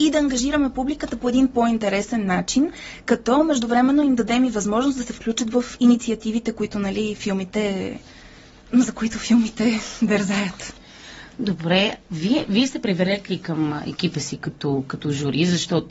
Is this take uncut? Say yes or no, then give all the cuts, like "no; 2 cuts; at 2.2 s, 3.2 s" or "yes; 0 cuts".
yes; 0 cuts